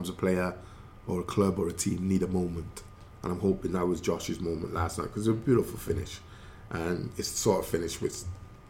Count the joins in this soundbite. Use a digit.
0